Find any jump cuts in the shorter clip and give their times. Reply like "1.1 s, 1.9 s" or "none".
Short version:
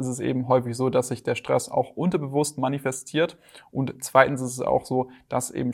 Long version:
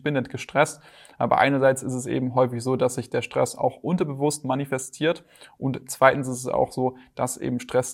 none